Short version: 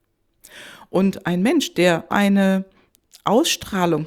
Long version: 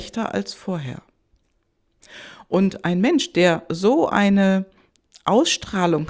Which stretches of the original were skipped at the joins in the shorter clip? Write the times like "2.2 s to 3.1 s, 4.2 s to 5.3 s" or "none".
3.7 s to 4.1 s